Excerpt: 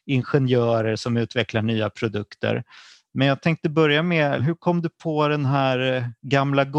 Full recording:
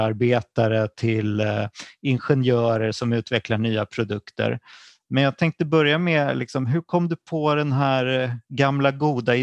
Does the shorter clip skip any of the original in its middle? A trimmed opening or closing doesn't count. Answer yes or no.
yes